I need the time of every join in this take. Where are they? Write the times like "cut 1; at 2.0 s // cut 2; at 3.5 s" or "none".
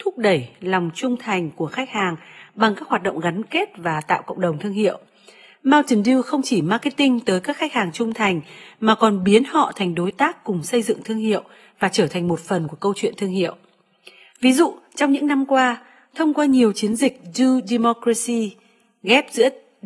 none